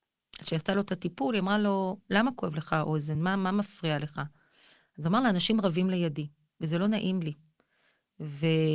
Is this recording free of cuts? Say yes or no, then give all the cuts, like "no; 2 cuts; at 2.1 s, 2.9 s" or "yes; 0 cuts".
yes; 0 cuts